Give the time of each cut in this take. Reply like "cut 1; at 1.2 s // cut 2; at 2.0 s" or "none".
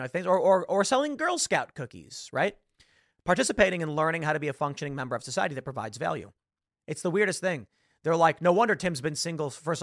cut 1; at 6.7 s